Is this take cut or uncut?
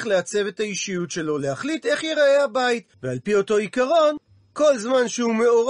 cut